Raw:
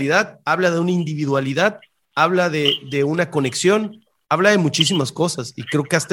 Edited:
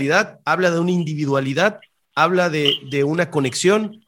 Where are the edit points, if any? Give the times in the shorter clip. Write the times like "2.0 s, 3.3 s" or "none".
none